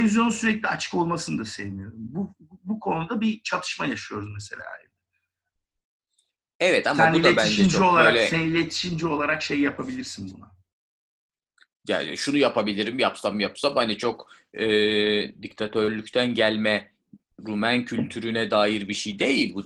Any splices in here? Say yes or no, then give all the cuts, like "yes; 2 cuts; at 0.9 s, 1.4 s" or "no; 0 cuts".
no; 0 cuts